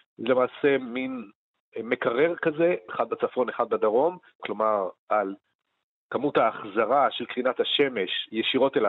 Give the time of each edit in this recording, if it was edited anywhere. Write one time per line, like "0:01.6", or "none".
0:02.9
0:04.4

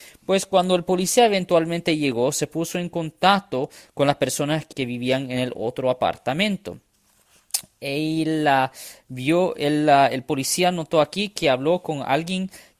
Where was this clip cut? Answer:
0:04.7

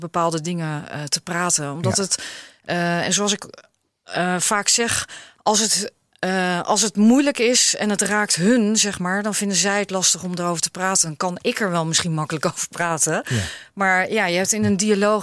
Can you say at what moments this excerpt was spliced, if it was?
none

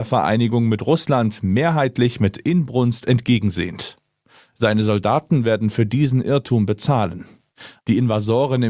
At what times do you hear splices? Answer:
0:07.8

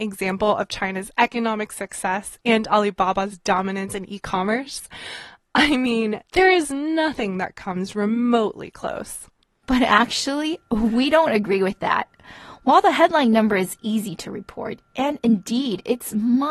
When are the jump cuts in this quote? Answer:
none

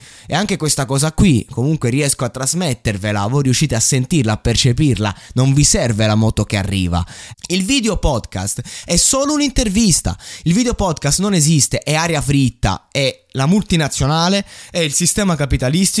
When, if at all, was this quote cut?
0:07.3

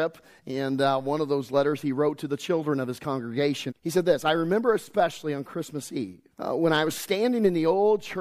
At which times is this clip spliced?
0:03.7
0:06.3

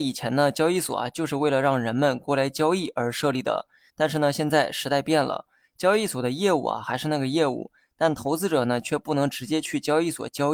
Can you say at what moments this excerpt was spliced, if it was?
0:03.9

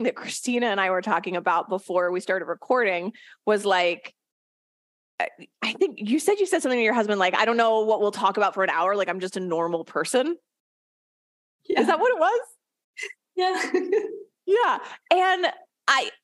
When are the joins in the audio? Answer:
none

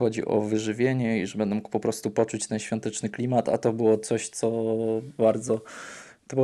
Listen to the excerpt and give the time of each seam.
none

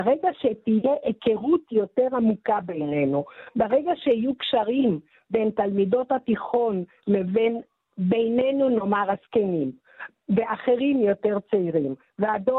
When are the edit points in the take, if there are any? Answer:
none

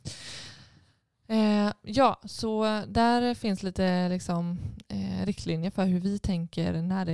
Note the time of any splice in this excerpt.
none

